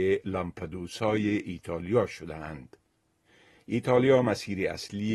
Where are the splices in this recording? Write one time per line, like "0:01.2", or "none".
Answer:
none